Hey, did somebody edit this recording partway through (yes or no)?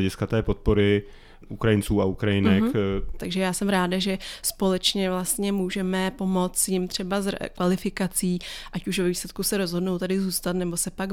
yes